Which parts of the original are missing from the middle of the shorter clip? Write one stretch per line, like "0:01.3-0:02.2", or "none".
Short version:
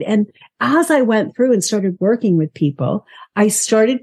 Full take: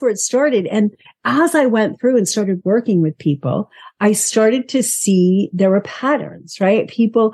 none